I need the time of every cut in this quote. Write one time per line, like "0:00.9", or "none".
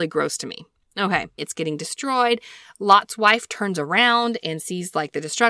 0:01.4